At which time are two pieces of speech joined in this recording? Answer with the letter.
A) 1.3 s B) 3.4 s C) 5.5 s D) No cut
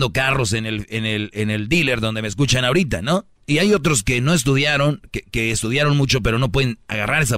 B